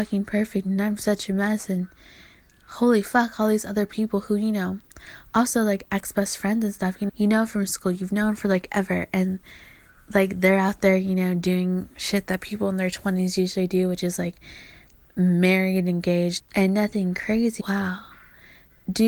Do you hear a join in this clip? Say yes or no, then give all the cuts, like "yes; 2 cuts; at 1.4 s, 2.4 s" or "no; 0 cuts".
yes; 3 cuts; at 7.1 s, 16.4 s, 17.6 s